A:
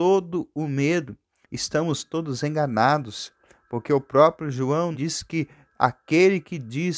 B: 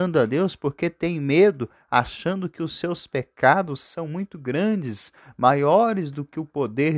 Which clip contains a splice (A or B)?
A